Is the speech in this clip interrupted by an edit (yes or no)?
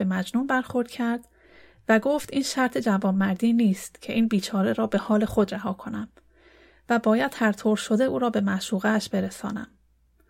no